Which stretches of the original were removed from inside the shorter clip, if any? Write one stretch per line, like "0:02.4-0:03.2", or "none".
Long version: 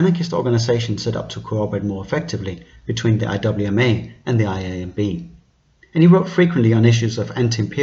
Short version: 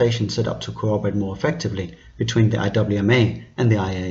none